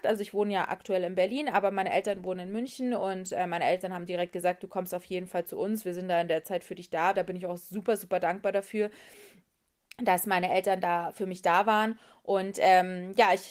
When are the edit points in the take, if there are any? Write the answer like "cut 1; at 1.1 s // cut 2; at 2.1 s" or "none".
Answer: cut 1; at 7.1 s